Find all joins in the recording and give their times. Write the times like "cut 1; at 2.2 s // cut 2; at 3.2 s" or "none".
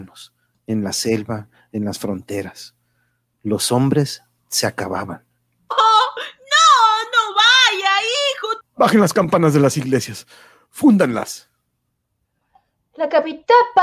cut 1; at 8.6 s